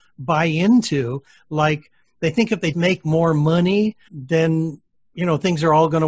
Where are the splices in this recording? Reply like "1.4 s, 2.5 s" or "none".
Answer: 2.7 s, 4.1 s